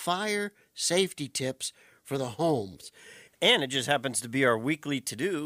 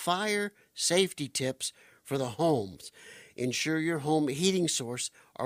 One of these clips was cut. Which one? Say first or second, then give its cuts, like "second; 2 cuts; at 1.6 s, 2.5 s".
first; 1 cut; at 3.3 s